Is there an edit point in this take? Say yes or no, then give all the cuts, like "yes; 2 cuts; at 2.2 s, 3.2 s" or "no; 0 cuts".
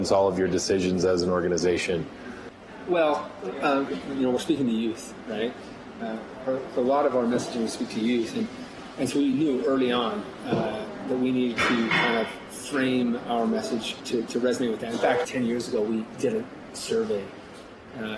yes; 2 cuts; at 3.9 s, 15.2 s